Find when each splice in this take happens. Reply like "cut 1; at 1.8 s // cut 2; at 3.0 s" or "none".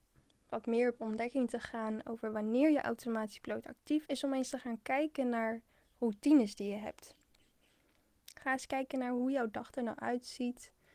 cut 1; at 4.1 s

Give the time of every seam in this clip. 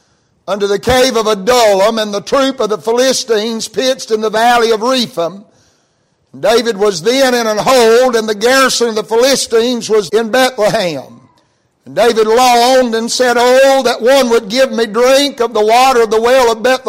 cut 1; at 10.1 s

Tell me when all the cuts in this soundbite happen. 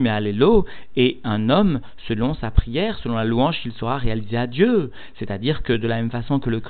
none

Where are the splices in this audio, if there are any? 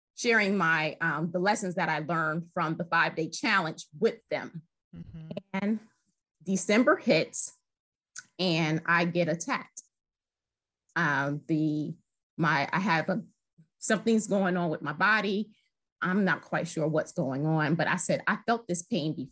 none

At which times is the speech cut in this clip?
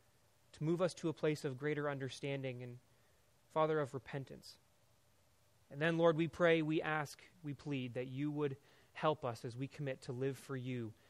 none

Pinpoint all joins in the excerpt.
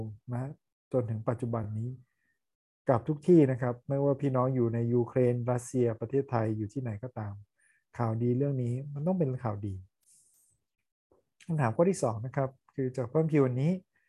none

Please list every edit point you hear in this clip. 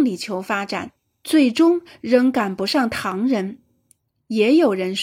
none

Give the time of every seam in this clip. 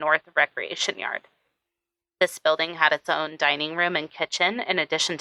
none

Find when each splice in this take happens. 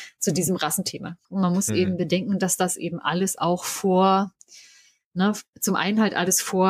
cut 1; at 1.2 s

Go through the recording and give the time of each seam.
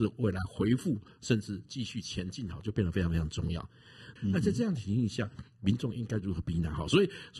cut 1; at 4.2 s

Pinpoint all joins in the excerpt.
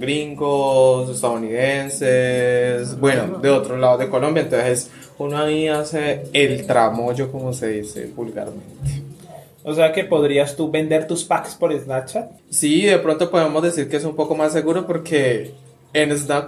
cut 1; at 12.4 s

